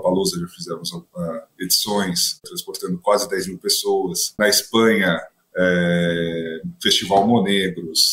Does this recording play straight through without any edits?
no; 2 cuts; at 2.4 s, 4.4 s

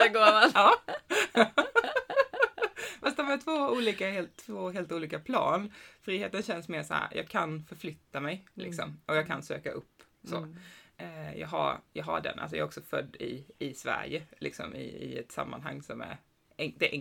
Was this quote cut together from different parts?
no; 0 cuts

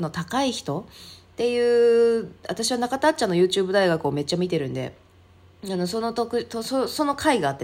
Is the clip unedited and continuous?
yes; 0 cuts

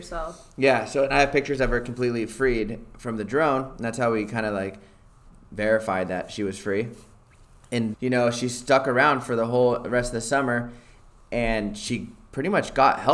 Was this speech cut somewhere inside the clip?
yes; 1 cut; at 7.9 s

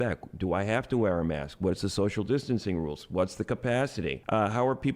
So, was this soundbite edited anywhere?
no; 0 cuts

